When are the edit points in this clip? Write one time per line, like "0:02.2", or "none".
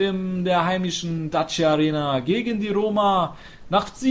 none